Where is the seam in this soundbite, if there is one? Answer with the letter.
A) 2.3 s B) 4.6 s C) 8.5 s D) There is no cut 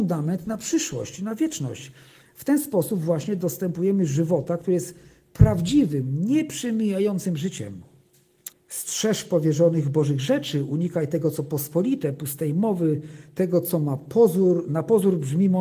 C